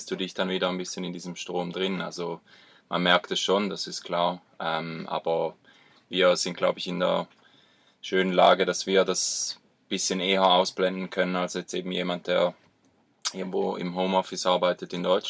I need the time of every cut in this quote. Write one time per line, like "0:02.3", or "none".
none